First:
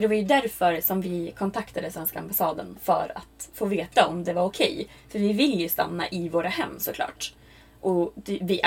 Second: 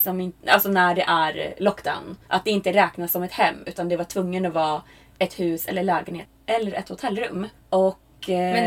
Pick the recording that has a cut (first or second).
second